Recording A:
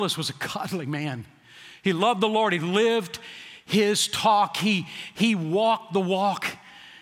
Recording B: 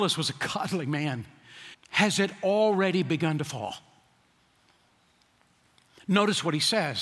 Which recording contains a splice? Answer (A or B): B